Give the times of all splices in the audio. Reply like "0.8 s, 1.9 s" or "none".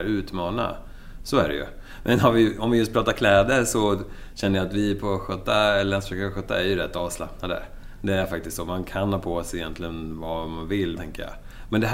11.0 s